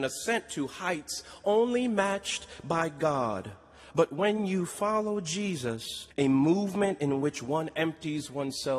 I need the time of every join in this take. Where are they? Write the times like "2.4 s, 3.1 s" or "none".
6.1 s